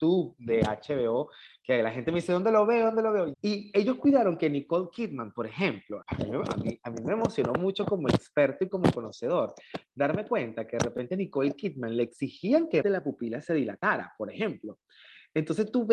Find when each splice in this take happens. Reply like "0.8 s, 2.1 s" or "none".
3.3 s, 6.0 s, 12.8 s

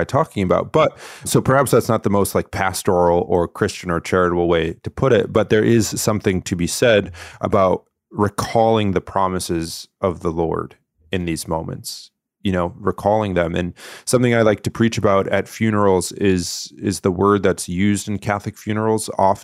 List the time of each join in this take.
1.2 s

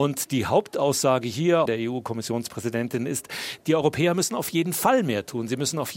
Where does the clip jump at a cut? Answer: 1.7 s, 3.6 s

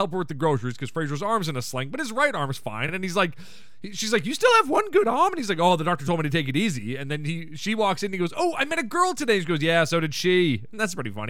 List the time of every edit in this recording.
none

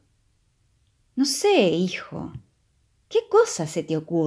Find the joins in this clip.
none

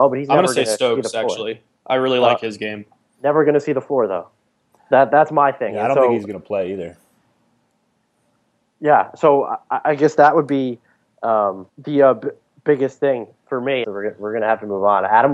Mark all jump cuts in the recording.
11.7 s, 13.8 s

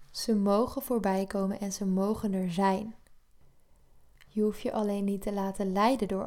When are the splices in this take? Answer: none

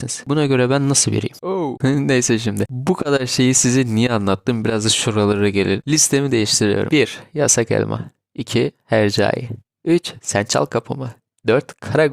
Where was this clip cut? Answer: none

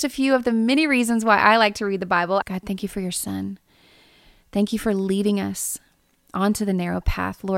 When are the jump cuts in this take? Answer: 2.4 s

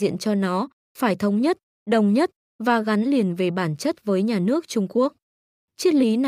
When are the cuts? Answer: none

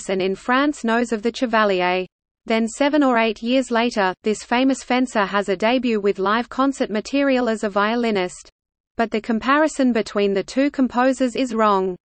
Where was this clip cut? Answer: 8.8 s

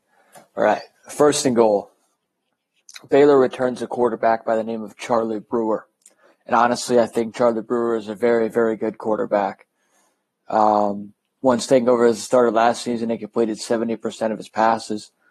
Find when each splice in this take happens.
none

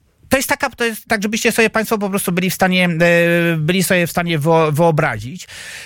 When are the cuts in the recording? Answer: 1.1 s

